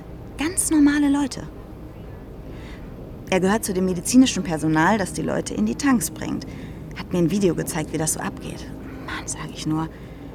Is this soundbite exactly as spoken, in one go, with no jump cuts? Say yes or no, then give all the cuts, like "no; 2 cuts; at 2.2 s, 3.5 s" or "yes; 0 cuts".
no; 2 cuts; at 3.2 s, 9.2 s